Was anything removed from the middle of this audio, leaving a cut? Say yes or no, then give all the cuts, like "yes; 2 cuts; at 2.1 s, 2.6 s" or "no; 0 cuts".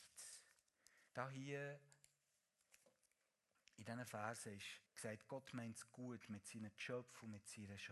yes; 2 cuts; at 1.1 s, 4.9 s